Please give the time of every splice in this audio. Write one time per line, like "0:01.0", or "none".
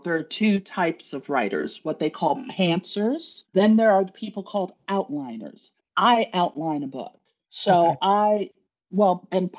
0:03.5

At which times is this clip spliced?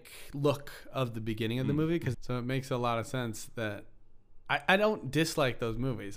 0:02.1

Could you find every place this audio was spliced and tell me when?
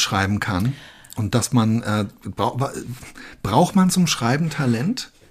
none

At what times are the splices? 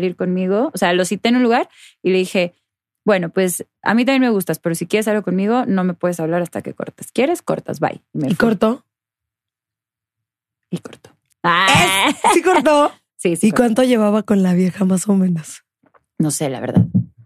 0:11.3

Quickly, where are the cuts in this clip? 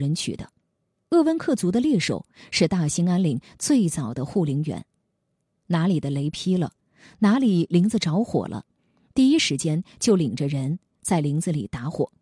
0:01.0

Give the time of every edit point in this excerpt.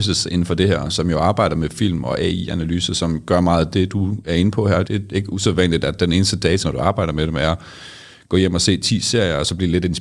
0:04.8
0:06.6

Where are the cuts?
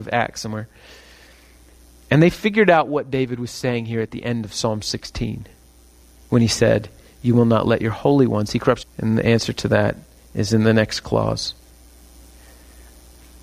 0:08.8

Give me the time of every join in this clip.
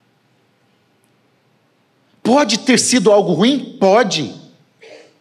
none

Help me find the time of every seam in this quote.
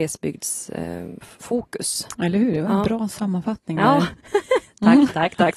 none

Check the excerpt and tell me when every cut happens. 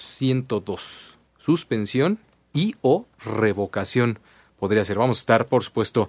0:01.3

